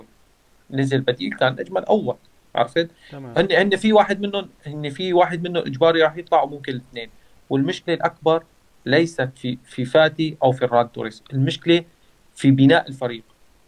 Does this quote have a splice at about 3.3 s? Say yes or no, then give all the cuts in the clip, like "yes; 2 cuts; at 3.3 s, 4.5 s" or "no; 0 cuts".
yes; 1 cut; at 3.3 s